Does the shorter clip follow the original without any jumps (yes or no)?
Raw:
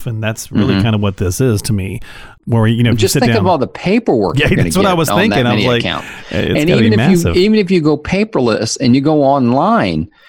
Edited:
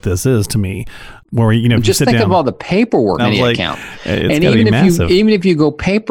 no